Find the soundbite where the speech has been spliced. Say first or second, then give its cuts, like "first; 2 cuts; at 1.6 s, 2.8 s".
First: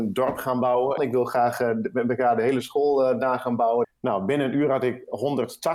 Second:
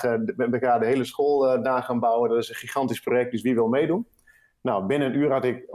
first; 2 cuts; at 1.0 s, 3.8 s